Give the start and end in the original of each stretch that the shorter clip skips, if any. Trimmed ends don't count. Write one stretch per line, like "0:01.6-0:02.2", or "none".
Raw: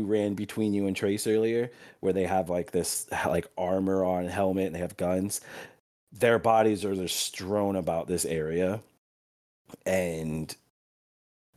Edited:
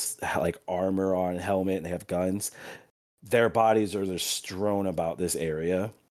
none